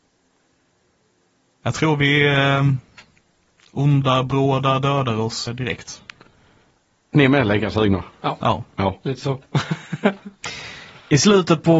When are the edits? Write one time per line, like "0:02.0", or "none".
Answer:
0:05.5